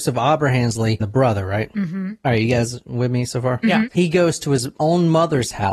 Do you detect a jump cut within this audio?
yes; 2 cuts; at 1.0 s, 3.9 s

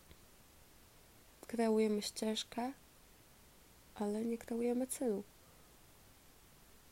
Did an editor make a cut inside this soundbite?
no; 0 cuts

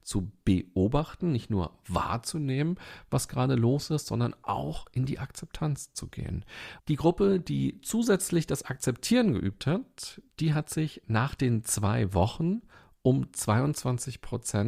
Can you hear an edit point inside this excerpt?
yes; 1 cut; at 6.8 s

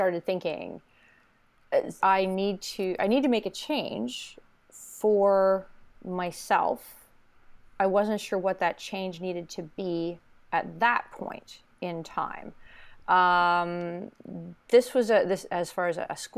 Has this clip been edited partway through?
yes; 1 cut; at 2.0 s

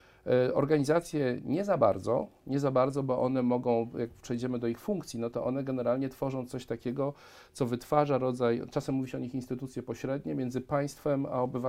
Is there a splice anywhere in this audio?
no; 0 cuts

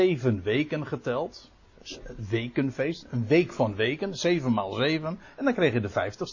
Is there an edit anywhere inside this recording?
no; 0 cuts

